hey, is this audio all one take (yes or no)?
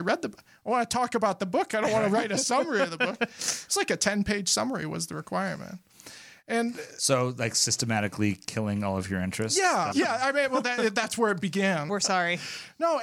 no